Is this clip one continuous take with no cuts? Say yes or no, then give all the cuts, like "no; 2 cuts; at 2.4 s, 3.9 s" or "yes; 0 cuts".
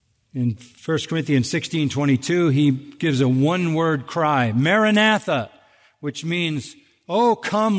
yes; 0 cuts